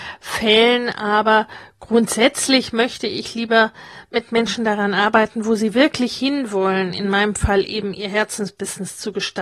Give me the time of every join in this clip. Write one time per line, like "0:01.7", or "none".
0:04.1